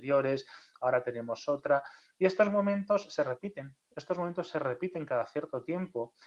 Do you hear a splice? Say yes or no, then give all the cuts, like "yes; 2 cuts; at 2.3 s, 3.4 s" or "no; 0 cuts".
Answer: no; 0 cuts